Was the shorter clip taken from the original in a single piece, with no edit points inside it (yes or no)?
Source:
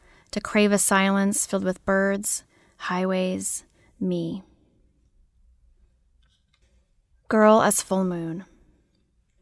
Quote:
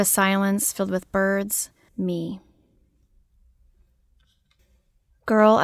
no